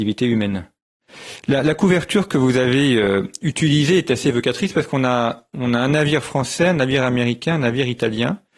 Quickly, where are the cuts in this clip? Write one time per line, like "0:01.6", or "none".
none